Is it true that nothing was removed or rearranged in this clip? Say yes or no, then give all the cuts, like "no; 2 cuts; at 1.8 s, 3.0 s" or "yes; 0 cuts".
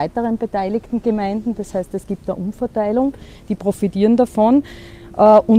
yes; 0 cuts